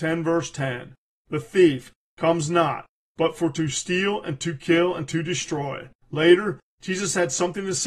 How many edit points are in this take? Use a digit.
1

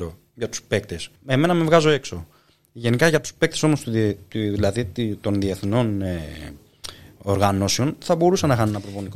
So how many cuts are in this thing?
1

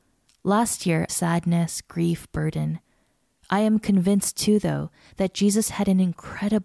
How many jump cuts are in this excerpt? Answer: 1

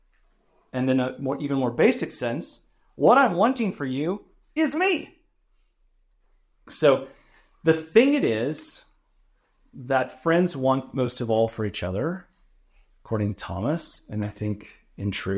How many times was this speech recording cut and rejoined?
1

